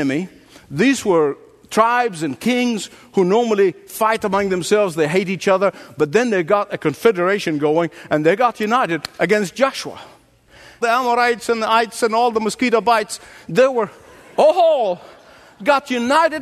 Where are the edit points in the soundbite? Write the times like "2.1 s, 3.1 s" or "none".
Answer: none